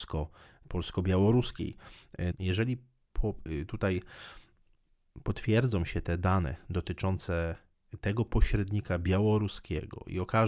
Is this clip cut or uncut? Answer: cut